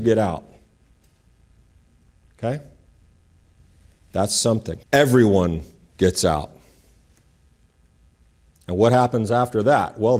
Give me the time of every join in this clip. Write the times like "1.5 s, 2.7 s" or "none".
4.8 s